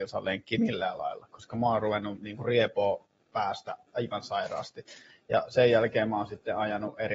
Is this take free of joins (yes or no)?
yes